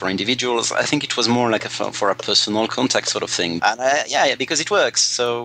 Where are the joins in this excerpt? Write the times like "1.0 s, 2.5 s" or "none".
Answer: 3.6 s